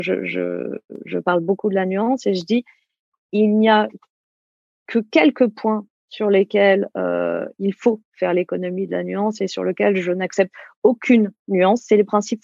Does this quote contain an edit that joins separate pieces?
no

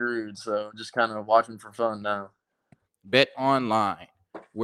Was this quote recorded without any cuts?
no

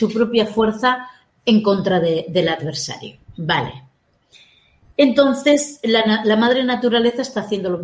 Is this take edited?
no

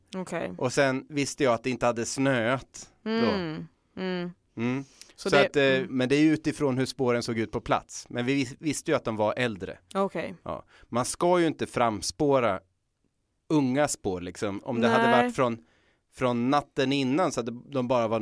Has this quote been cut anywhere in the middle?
yes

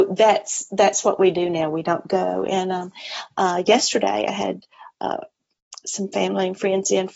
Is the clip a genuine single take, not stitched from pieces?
yes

